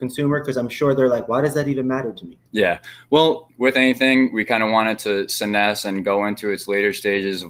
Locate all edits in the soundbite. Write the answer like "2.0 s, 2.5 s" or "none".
2.5 s, 3.5 s